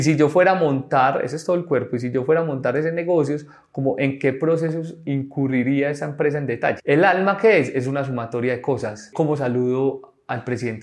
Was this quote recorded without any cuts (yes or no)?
no